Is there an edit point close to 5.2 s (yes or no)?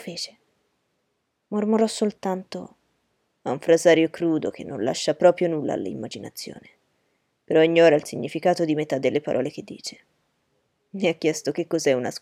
no